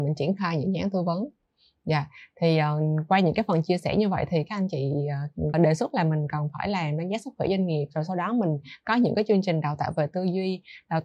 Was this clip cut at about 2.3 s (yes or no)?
no